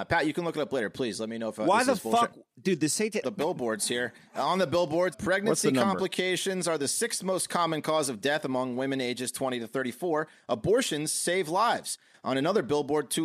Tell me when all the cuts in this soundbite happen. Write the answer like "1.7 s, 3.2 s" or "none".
3.2 s, 5.1 s

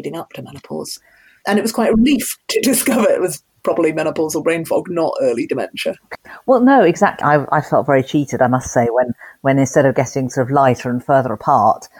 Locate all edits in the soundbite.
7.2 s

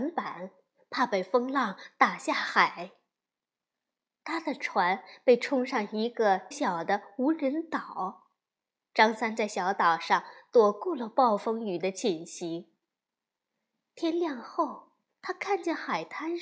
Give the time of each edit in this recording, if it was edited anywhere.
6.5 s, 15.1 s

